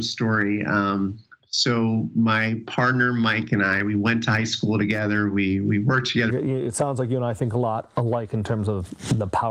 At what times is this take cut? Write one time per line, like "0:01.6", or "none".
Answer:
0:06.3